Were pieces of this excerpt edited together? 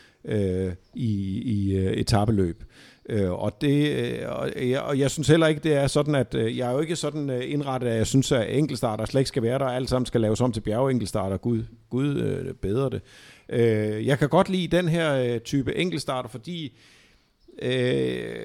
no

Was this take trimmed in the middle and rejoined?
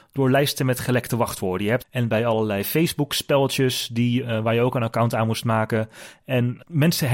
yes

